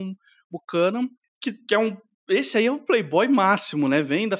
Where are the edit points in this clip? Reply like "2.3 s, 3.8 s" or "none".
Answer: none